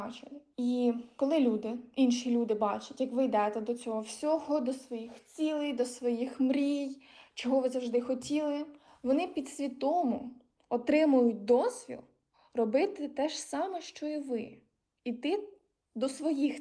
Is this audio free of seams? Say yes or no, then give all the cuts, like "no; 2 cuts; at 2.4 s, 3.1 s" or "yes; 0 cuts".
yes; 0 cuts